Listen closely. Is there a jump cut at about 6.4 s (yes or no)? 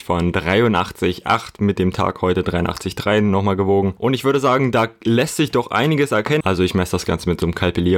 yes